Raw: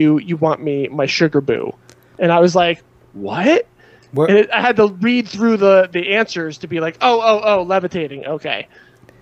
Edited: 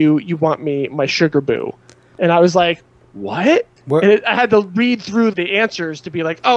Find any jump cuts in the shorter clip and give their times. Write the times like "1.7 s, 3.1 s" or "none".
3.8 s, 5.3 s

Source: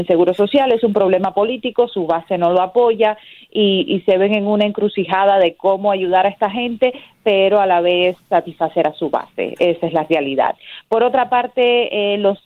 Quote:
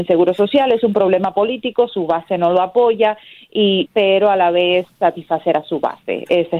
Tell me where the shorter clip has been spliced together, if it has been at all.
3.9 s

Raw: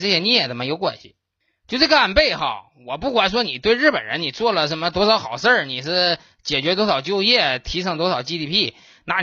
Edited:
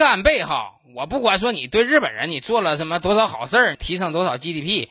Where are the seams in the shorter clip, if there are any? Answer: 3.7 s

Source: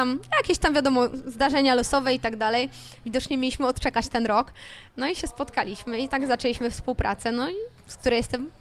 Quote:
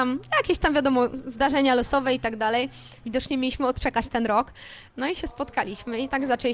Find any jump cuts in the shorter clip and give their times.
none

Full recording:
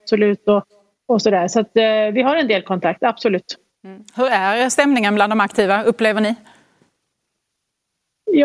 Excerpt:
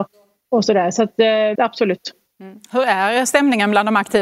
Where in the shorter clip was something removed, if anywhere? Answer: 1.5 s

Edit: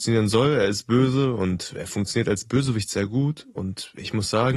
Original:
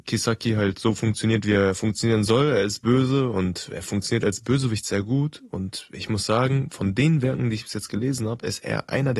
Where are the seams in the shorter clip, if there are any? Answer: none

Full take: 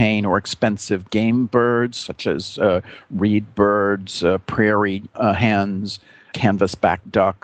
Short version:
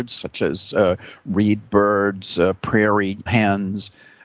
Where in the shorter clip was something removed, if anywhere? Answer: 3.3 s

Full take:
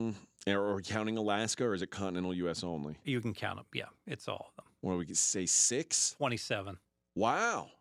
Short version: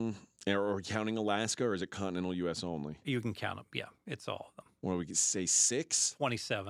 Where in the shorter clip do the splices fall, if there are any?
none

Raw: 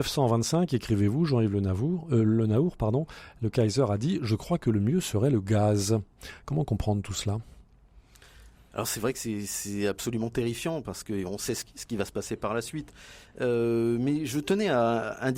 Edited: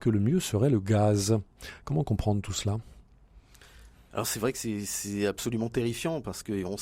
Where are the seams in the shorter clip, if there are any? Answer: none

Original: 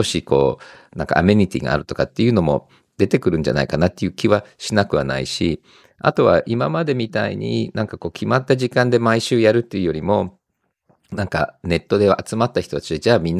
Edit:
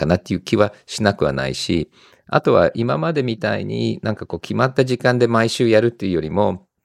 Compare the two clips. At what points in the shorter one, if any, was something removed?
none

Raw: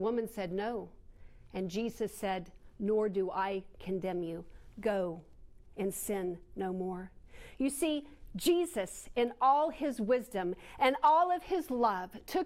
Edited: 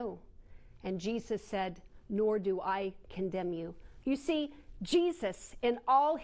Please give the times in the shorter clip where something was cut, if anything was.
4.0 s

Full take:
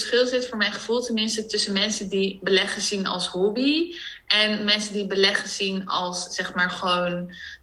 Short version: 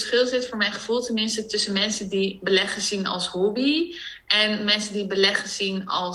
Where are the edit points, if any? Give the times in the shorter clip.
none

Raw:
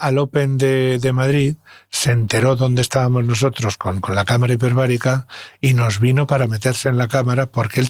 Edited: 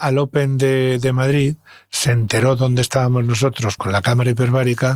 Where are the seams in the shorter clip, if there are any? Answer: 3.8 s

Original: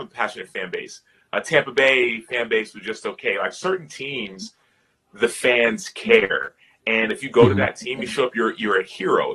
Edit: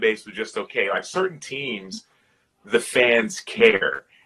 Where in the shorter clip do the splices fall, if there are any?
none

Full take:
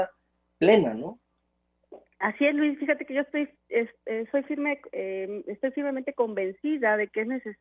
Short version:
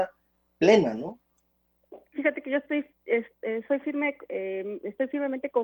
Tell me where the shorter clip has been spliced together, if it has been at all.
2.1 s

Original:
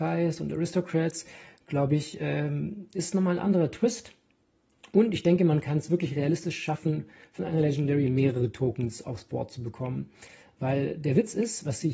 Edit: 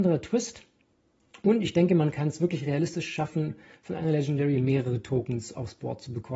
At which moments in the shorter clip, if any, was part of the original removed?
none

